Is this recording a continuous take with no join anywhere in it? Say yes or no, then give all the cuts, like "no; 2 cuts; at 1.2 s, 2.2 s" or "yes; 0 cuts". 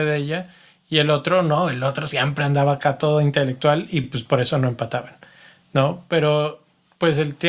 yes; 0 cuts